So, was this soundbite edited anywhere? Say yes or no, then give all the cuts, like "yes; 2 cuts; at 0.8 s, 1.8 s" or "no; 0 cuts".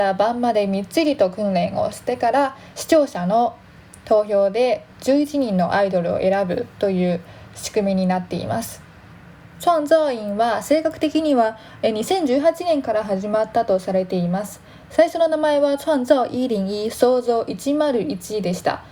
no; 0 cuts